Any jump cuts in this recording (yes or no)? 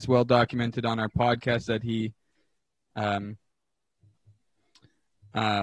no